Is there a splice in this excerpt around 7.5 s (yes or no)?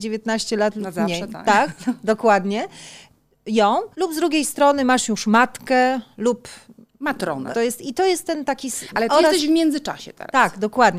yes